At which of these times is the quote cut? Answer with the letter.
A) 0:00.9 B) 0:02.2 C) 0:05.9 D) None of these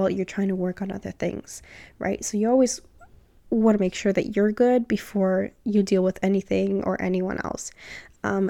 D